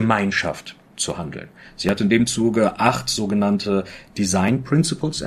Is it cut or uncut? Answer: uncut